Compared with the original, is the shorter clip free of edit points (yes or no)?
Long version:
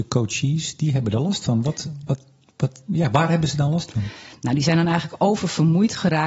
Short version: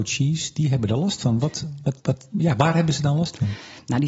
no